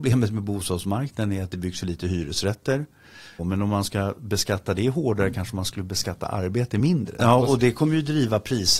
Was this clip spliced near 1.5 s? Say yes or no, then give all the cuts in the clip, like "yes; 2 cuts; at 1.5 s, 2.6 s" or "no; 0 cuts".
no; 2 cuts; at 3.4 s, 7.2 s